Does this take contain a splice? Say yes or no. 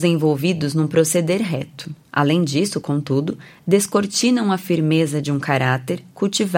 no